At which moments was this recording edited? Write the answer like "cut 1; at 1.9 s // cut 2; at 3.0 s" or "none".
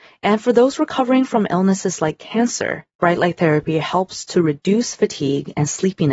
cut 1; at 2.9 s